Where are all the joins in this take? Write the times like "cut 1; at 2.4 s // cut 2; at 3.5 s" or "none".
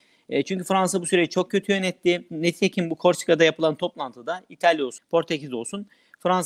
cut 1; at 2.3 s // cut 2; at 5.0 s